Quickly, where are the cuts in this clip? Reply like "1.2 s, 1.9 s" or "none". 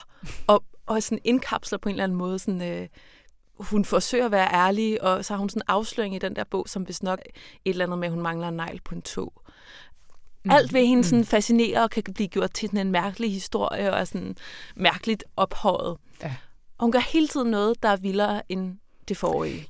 7.2 s